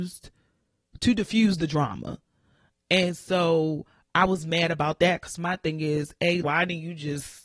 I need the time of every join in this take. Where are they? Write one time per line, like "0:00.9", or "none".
0:06.4